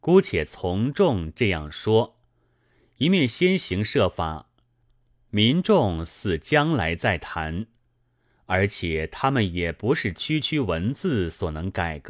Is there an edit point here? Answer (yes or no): no